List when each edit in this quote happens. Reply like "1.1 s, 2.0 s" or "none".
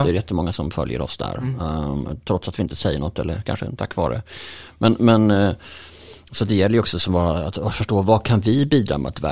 none